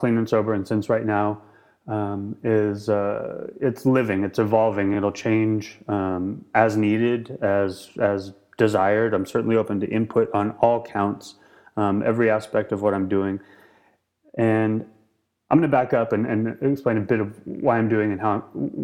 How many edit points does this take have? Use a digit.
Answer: 0